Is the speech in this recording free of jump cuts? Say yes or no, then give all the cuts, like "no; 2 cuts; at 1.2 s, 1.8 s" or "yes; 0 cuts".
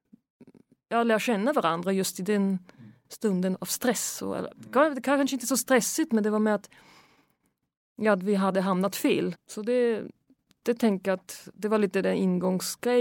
no; 2 cuts; at 3.5 s, 9.3 s